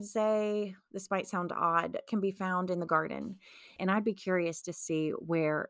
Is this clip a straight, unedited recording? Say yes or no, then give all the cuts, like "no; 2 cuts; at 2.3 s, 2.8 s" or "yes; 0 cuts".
no; 1 cut; at 3.8 s